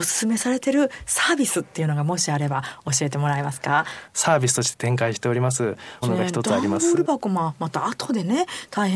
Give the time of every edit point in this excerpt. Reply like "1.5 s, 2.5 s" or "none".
4.1 s, 6.0 s

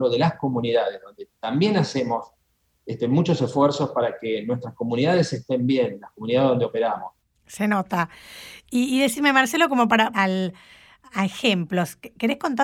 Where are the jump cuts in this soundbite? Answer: 10.1 s

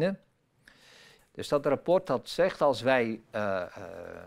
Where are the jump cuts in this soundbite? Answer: 1.2 s

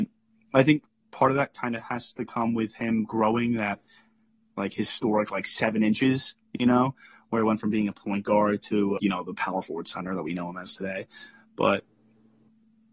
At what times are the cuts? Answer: 9.0 s

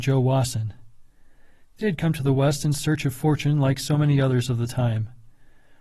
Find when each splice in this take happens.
none

